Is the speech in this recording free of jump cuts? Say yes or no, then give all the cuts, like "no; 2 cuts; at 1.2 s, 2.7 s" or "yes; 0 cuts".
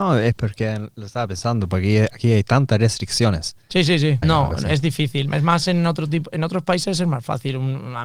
no; 1 cut; at 4.2 s